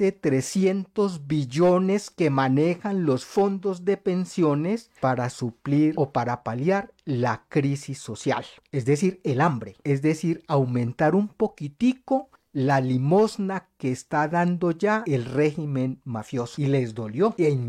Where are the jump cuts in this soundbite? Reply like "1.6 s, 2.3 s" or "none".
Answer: 5.0 s